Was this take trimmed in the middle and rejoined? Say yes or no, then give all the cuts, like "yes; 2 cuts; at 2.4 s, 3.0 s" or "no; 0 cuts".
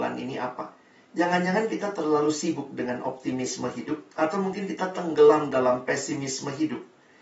yes; 1 cut; at 4.1 s